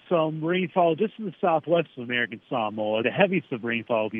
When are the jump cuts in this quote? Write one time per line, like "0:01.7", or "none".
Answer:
0:03.0